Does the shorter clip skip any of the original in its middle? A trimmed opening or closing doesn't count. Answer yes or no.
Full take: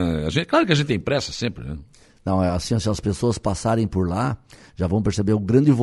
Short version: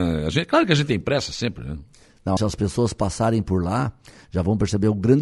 yes